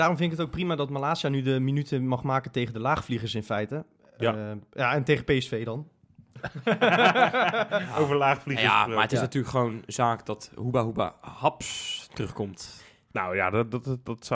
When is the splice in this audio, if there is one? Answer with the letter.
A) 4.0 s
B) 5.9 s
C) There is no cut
C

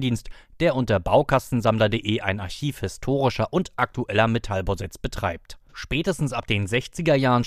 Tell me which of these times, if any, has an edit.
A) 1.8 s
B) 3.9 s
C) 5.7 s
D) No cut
D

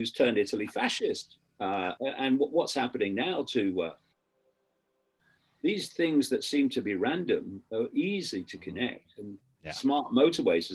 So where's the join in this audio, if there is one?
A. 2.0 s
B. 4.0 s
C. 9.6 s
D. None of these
A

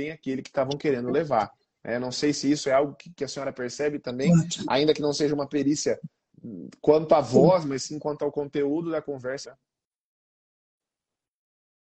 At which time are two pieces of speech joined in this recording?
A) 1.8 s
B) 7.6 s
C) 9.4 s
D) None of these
C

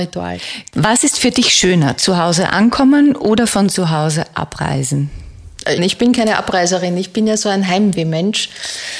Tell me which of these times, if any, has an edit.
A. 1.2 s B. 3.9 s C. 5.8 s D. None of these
C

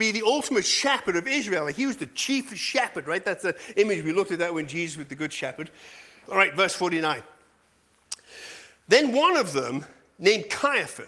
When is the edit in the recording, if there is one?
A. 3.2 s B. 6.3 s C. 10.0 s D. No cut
B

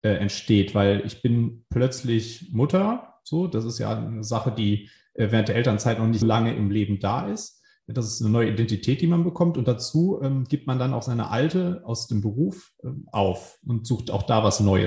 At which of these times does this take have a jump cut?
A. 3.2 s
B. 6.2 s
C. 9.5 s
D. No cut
B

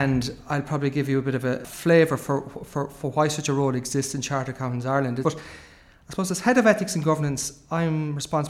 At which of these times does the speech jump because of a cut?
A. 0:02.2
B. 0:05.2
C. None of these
B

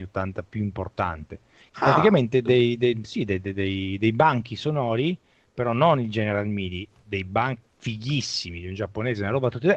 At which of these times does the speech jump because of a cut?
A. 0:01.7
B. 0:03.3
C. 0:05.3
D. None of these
A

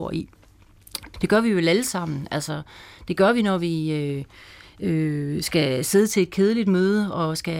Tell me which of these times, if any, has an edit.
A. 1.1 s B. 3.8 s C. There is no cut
A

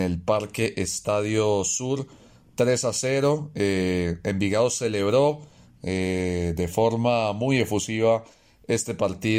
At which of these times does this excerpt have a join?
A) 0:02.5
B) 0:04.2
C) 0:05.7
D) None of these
D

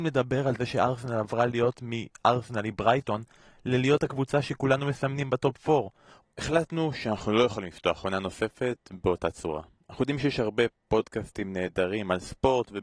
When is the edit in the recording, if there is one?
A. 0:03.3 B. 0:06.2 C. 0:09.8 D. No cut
B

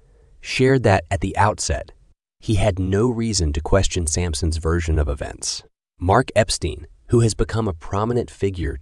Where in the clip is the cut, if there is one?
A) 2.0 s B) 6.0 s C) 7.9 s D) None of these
B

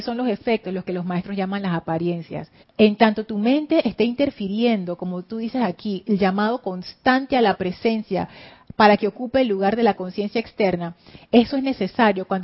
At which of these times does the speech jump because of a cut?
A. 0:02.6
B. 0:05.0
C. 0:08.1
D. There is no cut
A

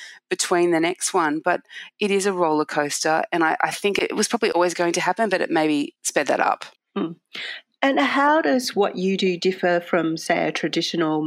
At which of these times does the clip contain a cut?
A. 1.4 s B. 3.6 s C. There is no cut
C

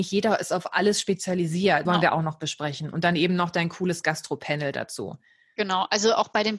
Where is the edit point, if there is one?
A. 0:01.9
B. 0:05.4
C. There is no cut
A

